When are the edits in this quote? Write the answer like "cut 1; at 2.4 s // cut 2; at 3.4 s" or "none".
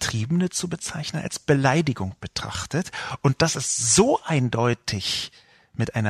none